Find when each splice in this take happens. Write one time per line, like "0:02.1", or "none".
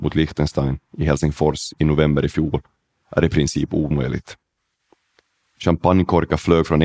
none